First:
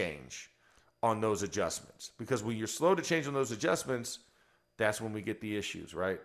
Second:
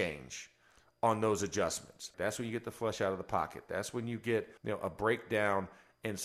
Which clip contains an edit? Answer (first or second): second